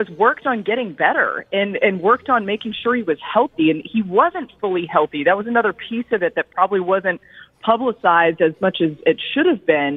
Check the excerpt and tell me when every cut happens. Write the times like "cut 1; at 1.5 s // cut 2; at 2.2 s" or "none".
none